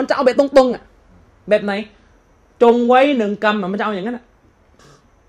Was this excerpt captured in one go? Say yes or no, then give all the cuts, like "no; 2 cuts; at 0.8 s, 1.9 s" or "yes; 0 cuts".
yes; 0 cuts